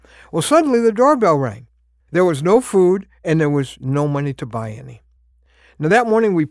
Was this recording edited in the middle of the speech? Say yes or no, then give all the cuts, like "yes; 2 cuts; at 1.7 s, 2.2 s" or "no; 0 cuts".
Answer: yes; 1 cut; at 2.1 s